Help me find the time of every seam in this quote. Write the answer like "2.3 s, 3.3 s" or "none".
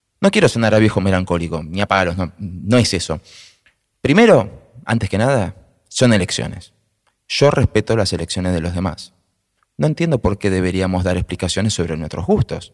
none